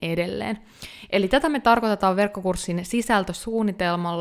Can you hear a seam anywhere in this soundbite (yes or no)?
no